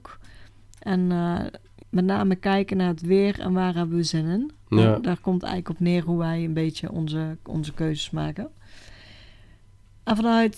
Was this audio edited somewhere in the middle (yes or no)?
yes